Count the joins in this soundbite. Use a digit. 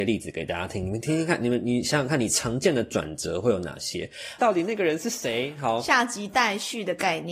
1